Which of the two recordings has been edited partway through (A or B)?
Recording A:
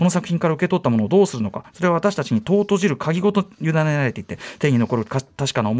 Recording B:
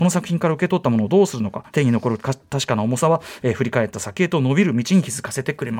B